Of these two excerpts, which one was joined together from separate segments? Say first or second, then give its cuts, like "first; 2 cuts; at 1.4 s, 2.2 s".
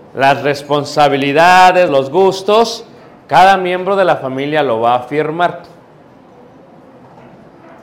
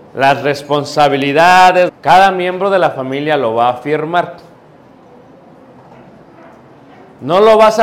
second; 1 cut; at 1.9 s